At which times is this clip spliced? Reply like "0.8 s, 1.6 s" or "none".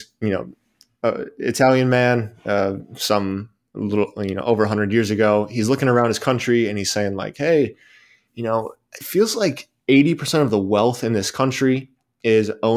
none